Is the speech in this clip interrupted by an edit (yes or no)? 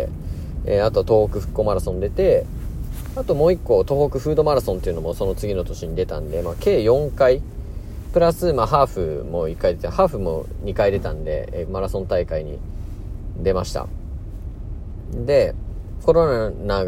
yes